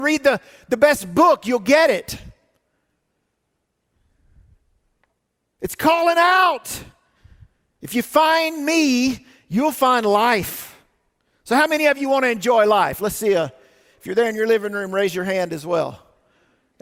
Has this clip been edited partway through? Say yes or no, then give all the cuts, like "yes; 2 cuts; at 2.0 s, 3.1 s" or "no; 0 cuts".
no; 0 cuts